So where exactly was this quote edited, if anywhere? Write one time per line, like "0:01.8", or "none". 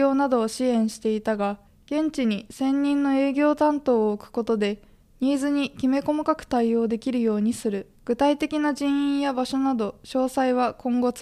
0:08.0